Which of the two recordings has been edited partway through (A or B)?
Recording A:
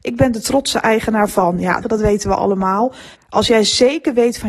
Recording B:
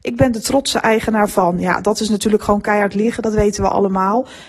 A